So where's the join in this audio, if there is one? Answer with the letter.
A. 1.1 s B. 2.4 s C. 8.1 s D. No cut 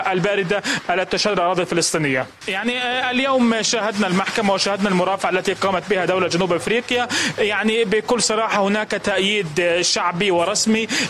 B